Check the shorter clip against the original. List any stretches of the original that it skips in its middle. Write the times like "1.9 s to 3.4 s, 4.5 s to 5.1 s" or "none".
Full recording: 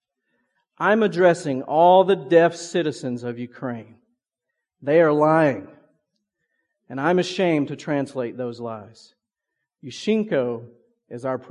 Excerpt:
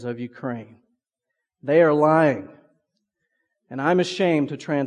none